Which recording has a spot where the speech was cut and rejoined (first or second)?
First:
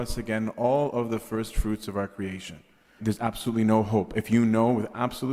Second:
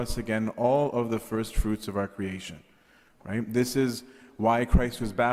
first